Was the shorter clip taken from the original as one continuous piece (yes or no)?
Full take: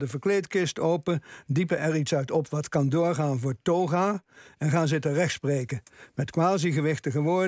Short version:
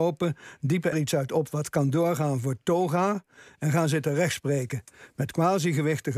no